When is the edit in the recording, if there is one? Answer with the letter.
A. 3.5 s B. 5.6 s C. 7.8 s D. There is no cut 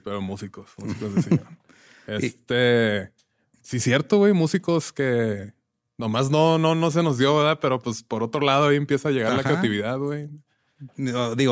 D